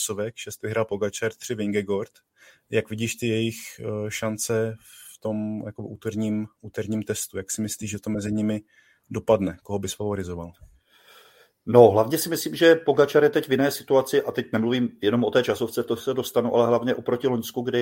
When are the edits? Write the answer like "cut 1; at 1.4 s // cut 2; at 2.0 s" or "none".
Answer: none